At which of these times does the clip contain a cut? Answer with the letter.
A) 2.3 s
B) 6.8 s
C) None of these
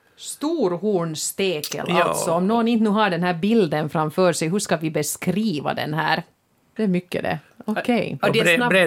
B